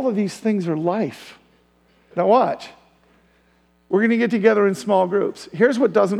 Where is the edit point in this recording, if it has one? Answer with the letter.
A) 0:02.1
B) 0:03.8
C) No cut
A